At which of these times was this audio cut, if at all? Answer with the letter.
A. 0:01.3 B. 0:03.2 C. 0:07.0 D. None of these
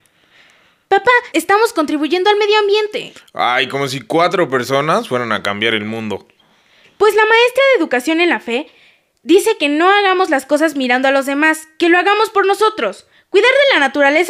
A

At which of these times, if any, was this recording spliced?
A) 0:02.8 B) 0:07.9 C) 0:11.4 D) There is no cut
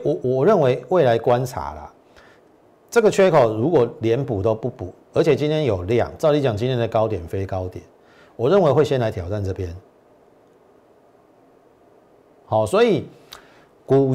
D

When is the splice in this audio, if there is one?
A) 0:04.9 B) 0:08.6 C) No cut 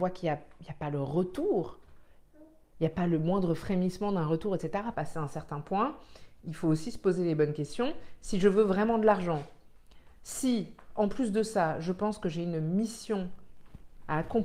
A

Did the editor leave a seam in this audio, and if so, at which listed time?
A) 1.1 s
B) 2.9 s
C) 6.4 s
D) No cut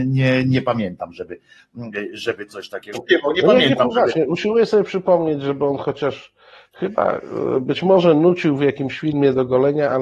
B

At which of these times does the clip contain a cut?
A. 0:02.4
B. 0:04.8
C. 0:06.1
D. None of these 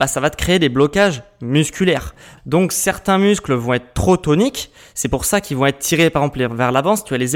A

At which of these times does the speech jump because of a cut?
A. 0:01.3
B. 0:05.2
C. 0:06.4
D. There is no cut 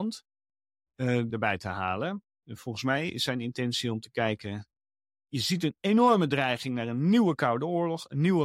A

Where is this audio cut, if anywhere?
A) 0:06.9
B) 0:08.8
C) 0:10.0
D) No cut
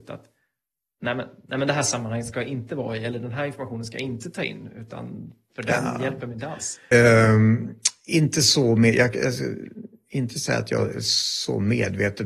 A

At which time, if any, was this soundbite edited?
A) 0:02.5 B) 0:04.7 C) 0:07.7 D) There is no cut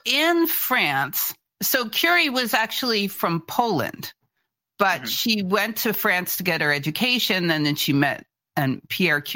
D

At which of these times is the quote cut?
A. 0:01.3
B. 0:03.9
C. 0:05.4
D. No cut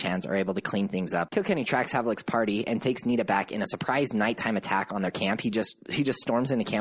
A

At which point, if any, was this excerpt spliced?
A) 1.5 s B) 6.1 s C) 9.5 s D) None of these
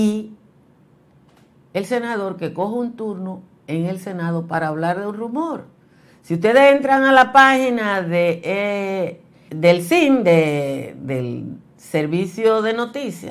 C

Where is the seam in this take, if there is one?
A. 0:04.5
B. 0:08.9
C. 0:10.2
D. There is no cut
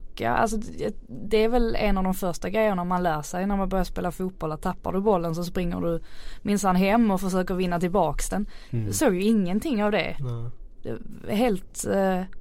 D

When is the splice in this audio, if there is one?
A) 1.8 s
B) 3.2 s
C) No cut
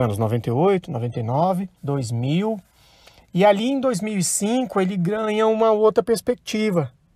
A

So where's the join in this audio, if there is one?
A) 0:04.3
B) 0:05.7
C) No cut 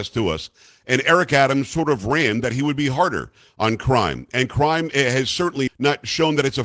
B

